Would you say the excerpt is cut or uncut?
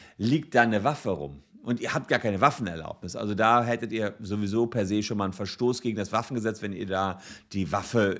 uncut